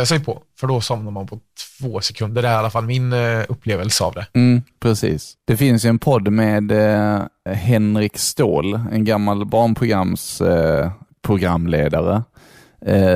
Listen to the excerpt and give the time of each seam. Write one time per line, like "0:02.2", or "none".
0:07.5